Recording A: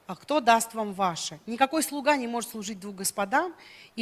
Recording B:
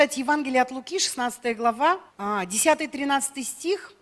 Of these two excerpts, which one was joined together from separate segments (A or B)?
B